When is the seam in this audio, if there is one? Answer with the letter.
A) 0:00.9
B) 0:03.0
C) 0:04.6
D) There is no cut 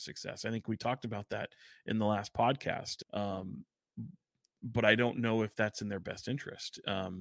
B